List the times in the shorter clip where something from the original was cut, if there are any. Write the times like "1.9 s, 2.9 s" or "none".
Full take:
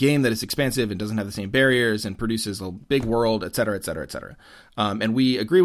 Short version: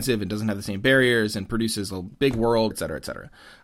2.7 s